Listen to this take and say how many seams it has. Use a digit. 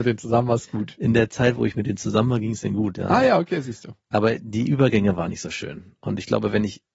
0